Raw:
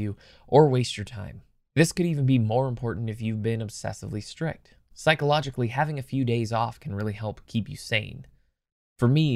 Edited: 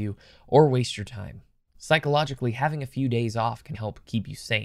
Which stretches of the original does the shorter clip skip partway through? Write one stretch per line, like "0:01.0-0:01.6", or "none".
0:01.7-0:04.8
0:06.9-0:07.2